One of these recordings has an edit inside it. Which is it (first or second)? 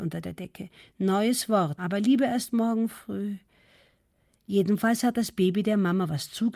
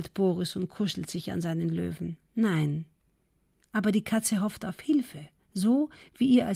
first